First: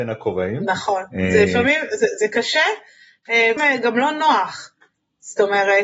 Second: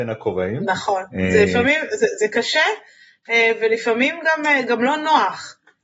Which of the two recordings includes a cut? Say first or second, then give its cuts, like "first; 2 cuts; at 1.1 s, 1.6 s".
first; 1 cut; at 3.6 s